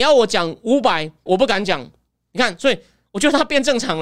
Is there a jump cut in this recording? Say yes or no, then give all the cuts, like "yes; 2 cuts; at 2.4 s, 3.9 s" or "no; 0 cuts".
yes; 1 cut; at 1.3 s